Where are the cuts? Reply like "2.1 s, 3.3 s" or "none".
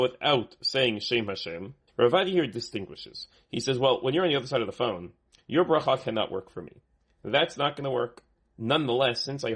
1.9 s